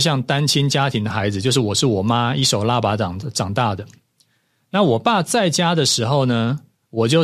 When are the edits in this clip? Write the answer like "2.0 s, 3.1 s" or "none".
none

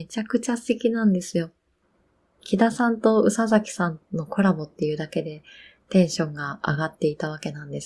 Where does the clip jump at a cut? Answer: none

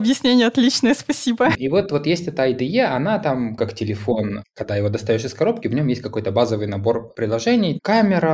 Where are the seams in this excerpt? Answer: 1.5 s

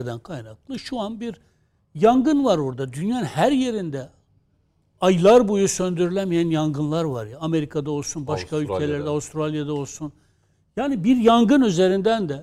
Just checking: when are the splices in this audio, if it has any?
none

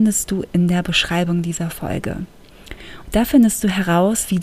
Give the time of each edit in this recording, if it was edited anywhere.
3.0 s

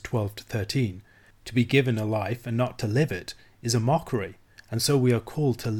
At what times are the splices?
1.3 s

